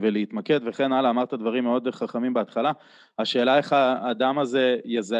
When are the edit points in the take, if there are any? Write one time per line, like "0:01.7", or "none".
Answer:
none